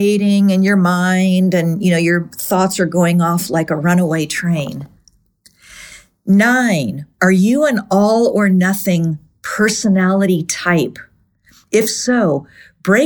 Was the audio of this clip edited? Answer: no; 0 cuts

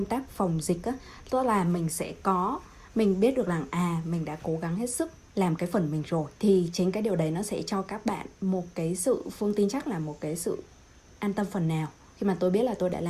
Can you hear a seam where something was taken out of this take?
yes; 1 cut; at 6.4 s

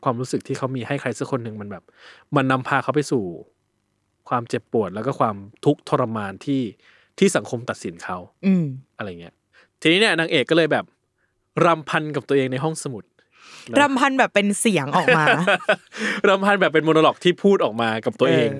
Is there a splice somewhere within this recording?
no; 0 cuts

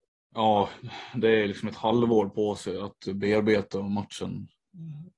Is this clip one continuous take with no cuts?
yes; 0 cuts

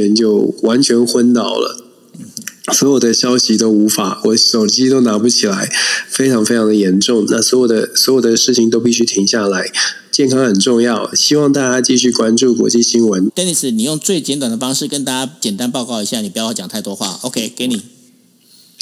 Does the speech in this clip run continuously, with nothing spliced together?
no; 3 cuts; at 7.3 s, 11.1 s, 13.3 s

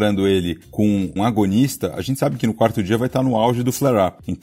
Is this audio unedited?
no; 1 cut; at 1.2 s

